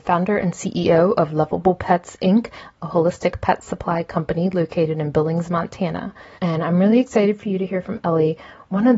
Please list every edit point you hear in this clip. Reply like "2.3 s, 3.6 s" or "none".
6.4 s